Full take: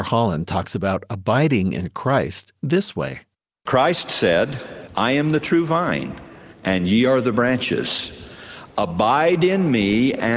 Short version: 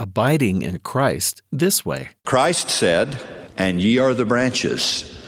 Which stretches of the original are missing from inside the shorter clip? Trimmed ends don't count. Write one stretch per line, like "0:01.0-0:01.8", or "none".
0:03.3-0:03.6
0:04.9-0:06.6